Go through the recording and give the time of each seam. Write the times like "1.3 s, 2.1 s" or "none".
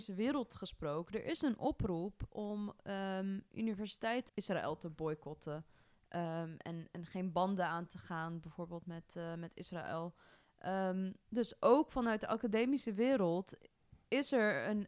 4.3 s